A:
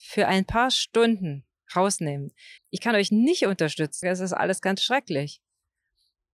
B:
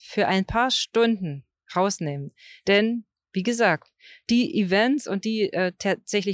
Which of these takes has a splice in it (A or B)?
A